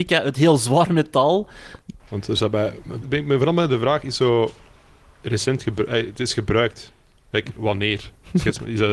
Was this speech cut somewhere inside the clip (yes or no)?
yes